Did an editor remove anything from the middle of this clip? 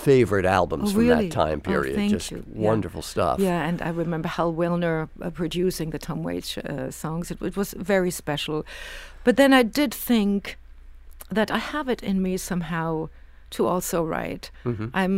no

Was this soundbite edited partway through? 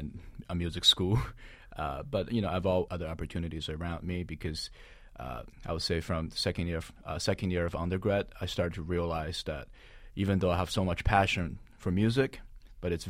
yes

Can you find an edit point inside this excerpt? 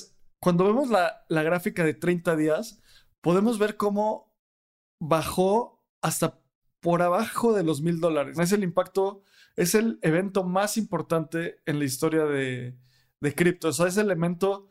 yes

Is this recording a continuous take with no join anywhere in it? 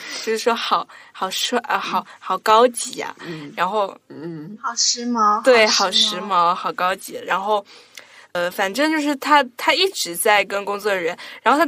yes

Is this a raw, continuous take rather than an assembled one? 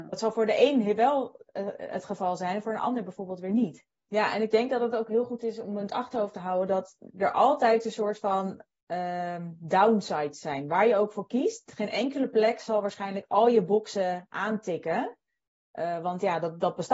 no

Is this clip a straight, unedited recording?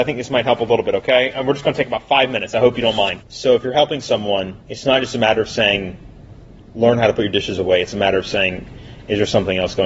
no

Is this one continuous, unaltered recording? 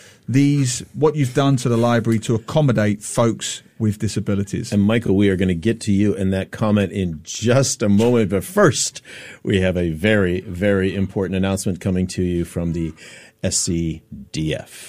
yes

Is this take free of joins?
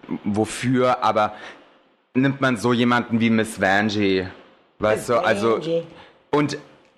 yes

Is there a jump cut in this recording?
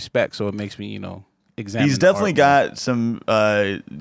no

